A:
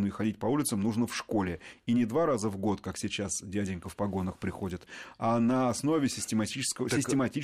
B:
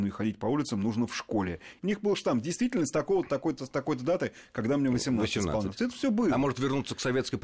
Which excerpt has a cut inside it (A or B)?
B